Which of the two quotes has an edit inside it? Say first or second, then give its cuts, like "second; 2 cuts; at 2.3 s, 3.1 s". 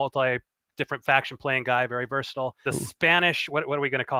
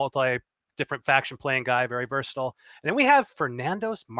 first; 1 cut; at 2.7 s